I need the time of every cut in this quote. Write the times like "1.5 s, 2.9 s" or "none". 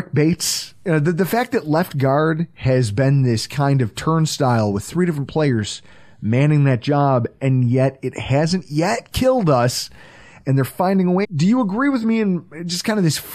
11.2 s

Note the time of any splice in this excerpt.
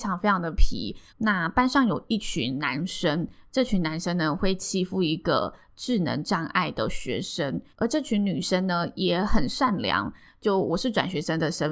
1.1 s, 7.7 s

